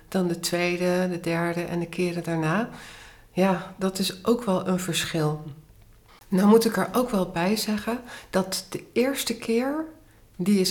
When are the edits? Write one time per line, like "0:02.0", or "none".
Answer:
0:06.1